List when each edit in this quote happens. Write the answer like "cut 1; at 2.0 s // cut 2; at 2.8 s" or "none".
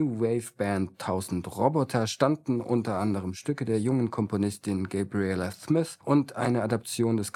cut 1; at 6.0 s